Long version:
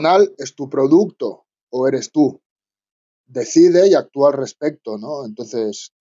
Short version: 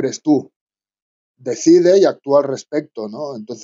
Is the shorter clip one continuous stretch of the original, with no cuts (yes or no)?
yes